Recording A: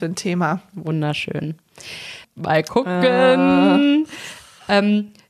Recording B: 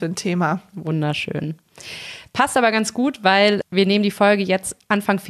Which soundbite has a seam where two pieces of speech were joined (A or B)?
A